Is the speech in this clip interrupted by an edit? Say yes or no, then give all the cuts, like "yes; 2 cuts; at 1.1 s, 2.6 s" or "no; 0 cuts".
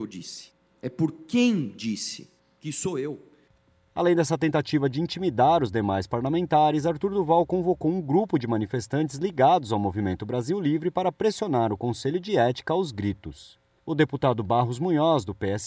no; 0 cuts